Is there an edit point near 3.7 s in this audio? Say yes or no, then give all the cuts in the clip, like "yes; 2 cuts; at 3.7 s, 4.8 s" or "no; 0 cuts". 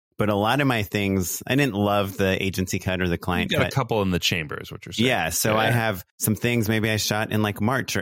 no; 1 cut; at 6.1 s